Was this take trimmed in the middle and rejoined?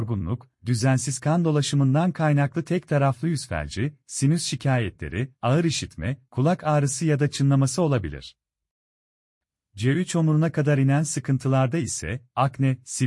no; 0 cuts

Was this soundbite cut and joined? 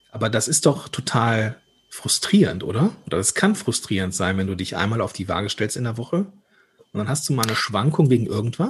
no; 0 cuts

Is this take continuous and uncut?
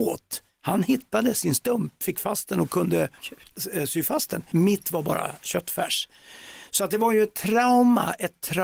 yes; 0 cuts

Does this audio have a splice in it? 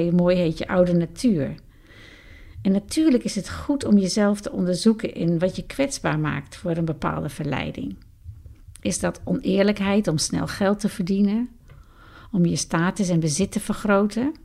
no; 0 cuts

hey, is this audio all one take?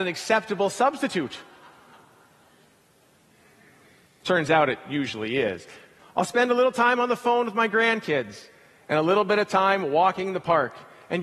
no; 1 cut; at 6.0 s

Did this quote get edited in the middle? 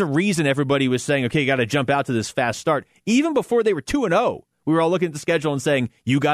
no; 0 cuts

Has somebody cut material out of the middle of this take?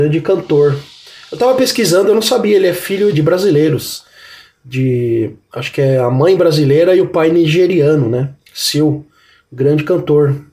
yes; 1 cut; at 3.1 s

